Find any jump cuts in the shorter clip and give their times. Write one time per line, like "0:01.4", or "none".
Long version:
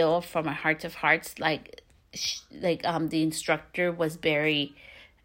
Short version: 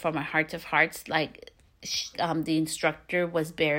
0:02.1